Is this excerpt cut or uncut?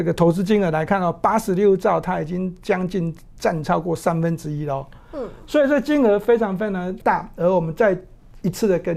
uncut